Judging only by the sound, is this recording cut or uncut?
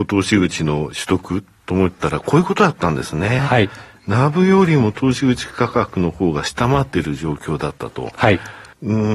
uncut